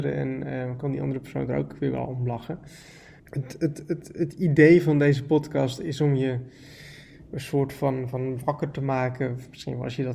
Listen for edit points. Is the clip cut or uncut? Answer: cut